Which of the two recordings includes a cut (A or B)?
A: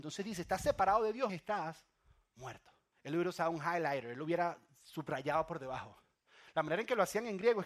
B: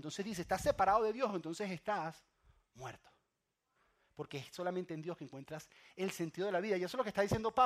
A